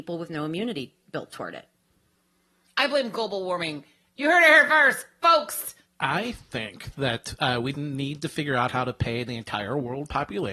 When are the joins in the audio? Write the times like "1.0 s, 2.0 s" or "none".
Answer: 7.7 s